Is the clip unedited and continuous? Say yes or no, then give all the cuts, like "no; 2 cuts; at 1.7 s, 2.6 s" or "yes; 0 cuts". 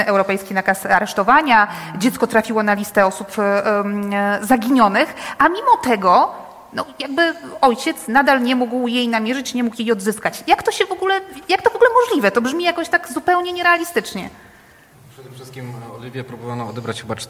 yes; 0 cuts